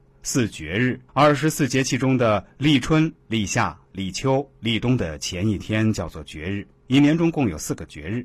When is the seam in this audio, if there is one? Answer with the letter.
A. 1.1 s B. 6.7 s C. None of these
A